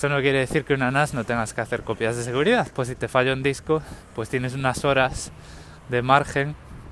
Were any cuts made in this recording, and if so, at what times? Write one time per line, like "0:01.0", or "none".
0:02.7

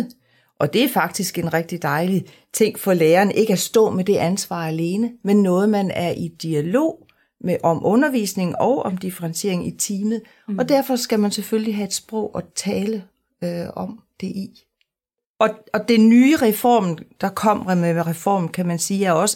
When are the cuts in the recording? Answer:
none

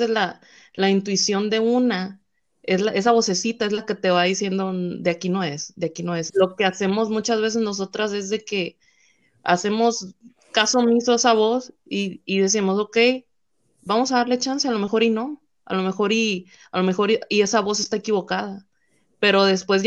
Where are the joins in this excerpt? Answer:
0:06.3

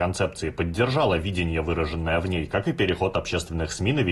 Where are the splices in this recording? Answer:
none

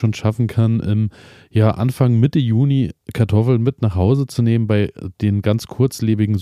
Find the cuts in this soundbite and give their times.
none

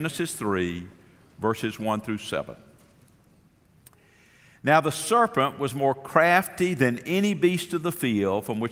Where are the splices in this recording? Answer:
none

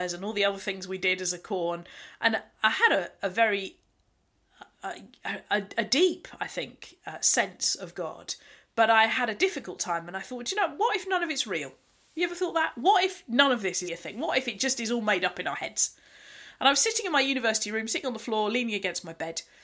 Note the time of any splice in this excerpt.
0:13.9

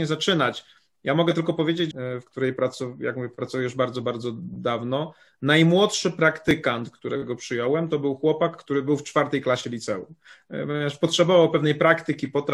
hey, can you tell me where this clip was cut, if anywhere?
0:01.9

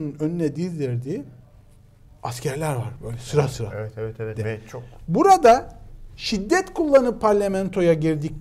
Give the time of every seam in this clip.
0:04.4

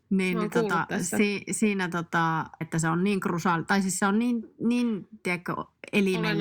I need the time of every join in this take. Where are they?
0:02.6

